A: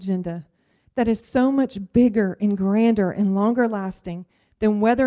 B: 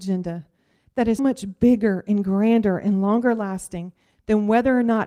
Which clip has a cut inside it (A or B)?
B